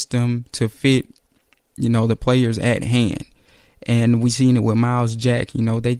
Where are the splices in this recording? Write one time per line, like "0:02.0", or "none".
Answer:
none